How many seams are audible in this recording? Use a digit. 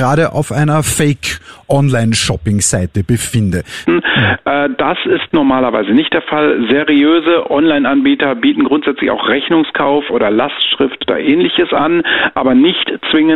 2